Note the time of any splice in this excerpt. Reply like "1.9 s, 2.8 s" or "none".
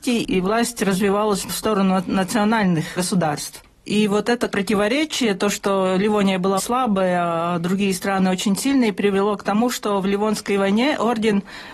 6.6 s

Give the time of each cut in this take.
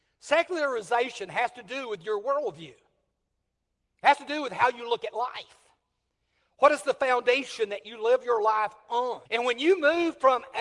9.3 s

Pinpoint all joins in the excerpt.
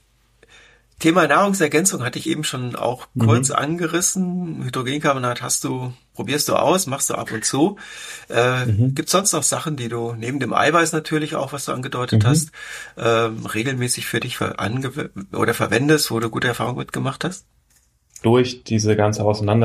none

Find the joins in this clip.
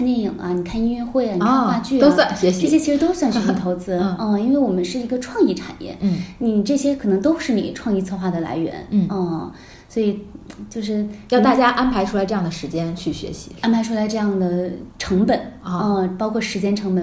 none

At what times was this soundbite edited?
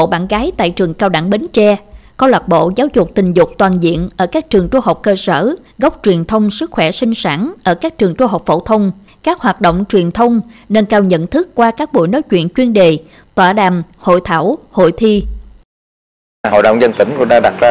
none

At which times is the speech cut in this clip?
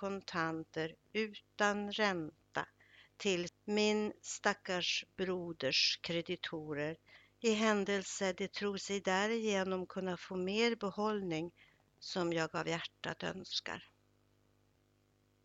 3.5 s

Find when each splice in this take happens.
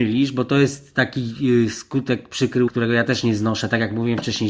2.7 s

